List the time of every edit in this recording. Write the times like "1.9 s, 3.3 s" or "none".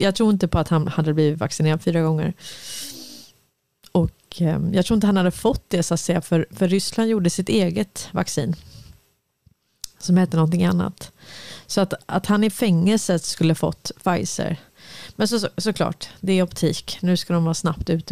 none